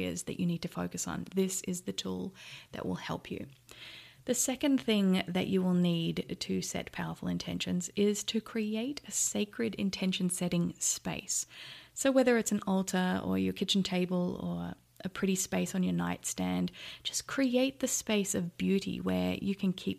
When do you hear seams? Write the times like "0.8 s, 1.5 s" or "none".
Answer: none